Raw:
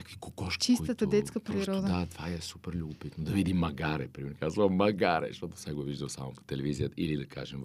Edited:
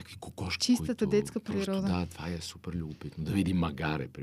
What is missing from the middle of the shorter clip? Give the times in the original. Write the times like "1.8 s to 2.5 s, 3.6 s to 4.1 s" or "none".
none